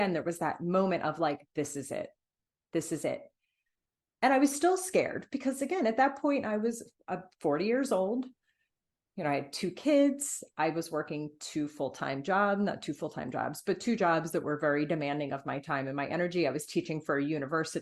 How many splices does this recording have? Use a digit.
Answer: 0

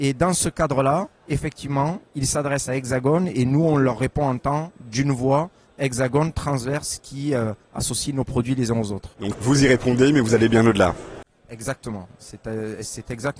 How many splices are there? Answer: 1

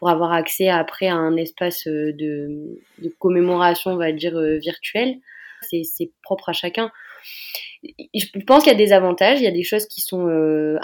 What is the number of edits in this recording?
1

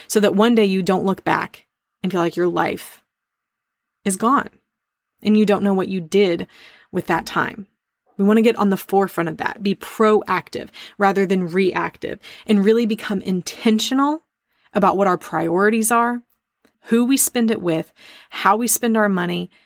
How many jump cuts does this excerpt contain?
1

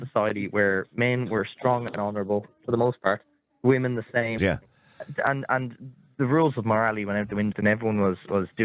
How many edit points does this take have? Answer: 2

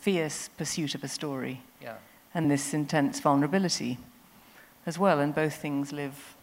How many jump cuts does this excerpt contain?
1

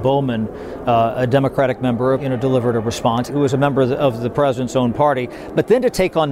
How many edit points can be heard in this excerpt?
2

